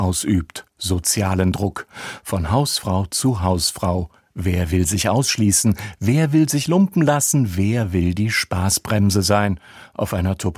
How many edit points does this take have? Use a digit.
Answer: 0